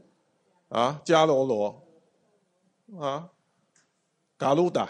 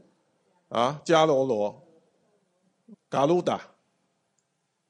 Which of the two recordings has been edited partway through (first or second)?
second